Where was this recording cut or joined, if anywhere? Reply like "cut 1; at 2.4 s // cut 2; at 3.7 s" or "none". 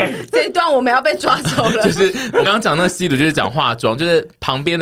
cut 1; at 2.4 s